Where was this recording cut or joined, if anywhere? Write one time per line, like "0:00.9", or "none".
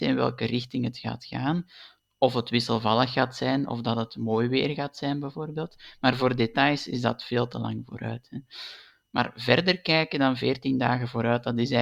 none